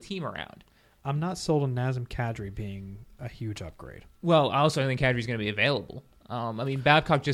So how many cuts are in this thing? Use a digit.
1